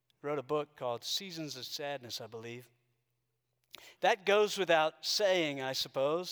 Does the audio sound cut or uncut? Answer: cut